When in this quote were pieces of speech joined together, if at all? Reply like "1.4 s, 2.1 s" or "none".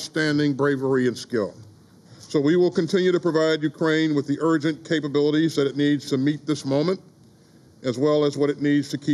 2.1 s